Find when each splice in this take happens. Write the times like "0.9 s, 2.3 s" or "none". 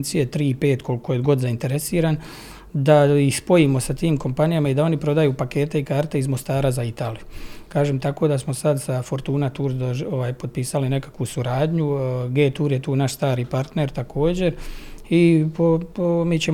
none